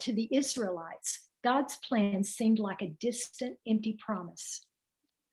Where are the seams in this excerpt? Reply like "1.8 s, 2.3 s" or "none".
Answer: none